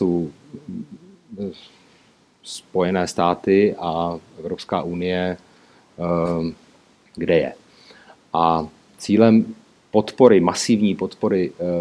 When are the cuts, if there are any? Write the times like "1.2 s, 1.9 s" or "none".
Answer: none